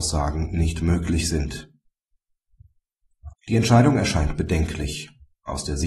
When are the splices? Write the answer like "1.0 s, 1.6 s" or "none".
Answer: 3.3 s